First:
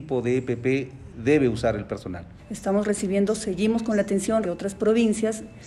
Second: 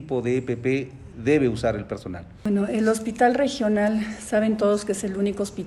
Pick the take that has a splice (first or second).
first